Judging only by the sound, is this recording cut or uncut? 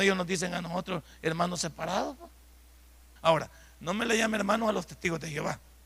cut